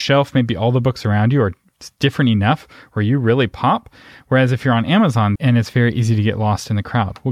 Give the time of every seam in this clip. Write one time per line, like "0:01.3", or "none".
0:05.4

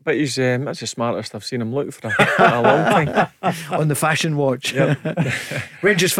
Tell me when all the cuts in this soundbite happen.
none

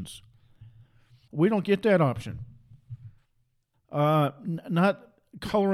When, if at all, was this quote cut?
0:01.3
0:03.7

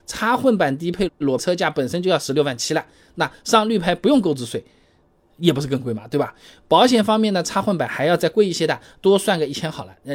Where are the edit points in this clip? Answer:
none

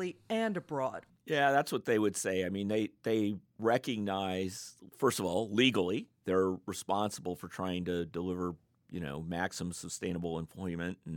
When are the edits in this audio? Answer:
0:01.1

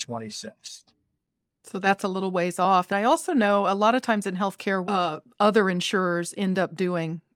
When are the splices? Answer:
0:04.8

